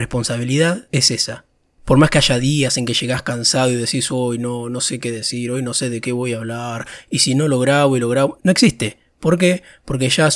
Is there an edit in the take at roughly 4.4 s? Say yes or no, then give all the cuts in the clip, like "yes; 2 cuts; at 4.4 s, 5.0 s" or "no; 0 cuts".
no; 1 cut; at 8.4 s